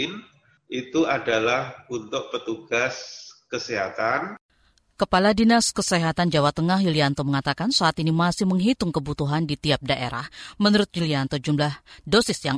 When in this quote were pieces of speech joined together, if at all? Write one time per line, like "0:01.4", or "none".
none